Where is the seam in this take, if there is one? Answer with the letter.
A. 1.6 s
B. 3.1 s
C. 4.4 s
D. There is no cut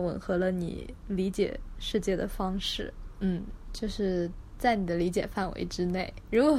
B